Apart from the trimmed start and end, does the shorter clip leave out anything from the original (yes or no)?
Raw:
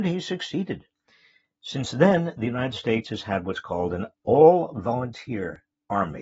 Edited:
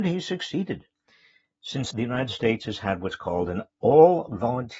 yes